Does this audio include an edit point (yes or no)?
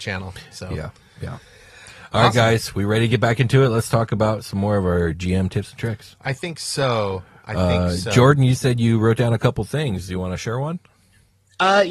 no